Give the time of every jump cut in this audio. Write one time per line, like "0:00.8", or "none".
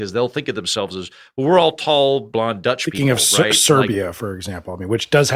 0:02.3